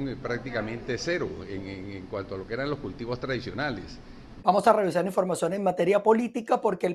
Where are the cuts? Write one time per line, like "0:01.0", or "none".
0:04.4

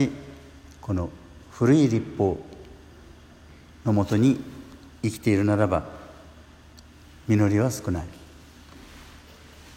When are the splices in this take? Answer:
none

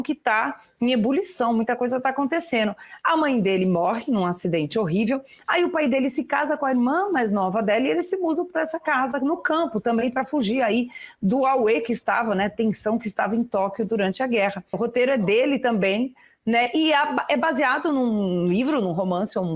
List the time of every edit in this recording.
0:14.7

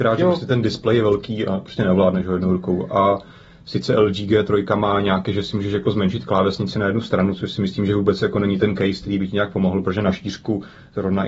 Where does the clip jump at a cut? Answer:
none

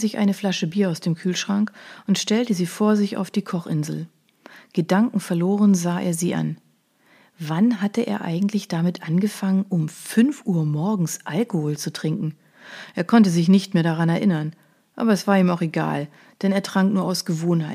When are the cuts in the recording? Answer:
none

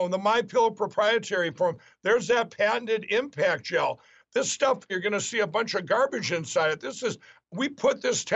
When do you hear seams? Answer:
0:04.9

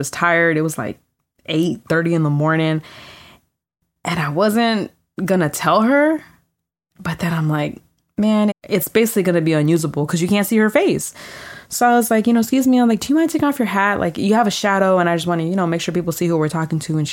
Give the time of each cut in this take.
0:08.5

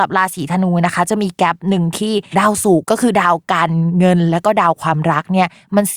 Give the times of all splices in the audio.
0:02.8

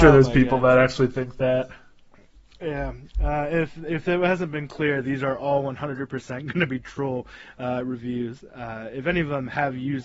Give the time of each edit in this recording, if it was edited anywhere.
none

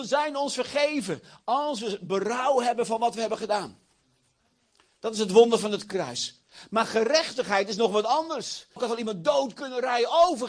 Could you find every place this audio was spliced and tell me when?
0:08.8

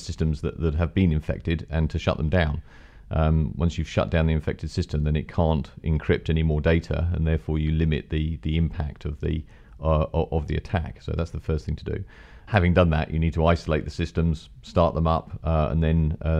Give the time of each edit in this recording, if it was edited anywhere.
none

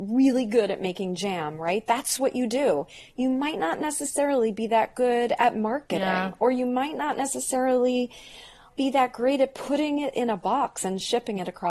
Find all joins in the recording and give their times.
none

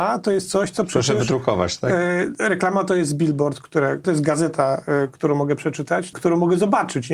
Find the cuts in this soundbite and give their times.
0:04.0
0:06.1

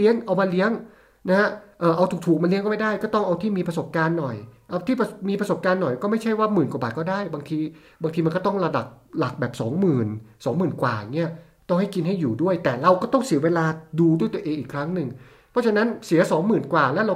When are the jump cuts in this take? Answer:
none

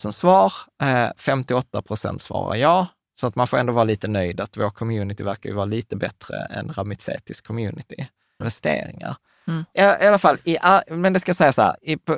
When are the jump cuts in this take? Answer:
0:08.4
0:09.7

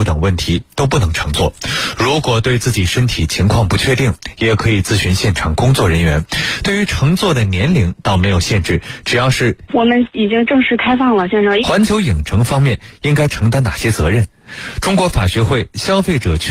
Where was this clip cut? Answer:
0:09.7
0:11.6

